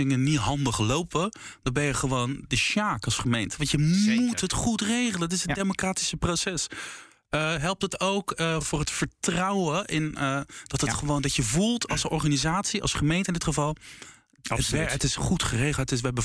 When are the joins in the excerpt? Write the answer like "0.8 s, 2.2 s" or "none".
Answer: none